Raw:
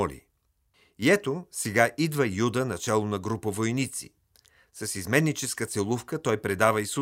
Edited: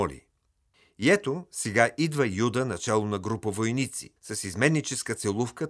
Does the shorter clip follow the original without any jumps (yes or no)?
no